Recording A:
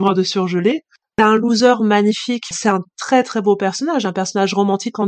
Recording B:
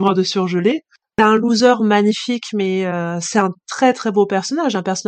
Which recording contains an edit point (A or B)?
A